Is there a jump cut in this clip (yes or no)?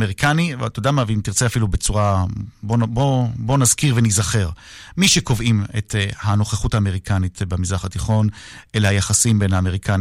no